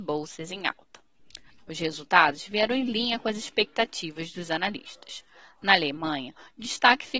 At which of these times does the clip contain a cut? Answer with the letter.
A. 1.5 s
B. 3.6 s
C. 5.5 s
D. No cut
A